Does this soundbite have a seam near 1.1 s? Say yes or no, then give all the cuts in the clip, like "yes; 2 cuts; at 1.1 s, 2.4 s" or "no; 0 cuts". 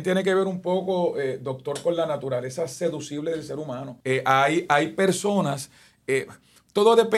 no; 1 cut; at 4.0 s